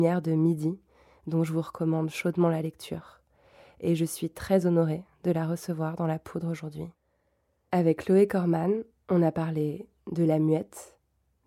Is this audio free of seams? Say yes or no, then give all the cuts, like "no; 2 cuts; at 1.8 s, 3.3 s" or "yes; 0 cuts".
yes; 0 cuts